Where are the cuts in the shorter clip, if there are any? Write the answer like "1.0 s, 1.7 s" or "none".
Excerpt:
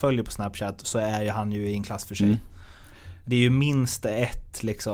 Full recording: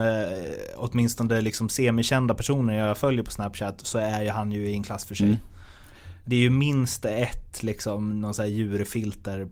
none